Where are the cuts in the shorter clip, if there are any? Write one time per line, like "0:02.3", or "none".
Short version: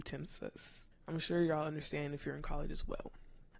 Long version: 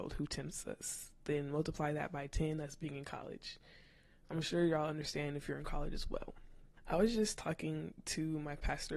0:00.9